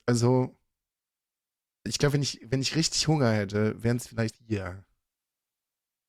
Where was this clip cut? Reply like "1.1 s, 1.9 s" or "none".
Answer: 4.3 s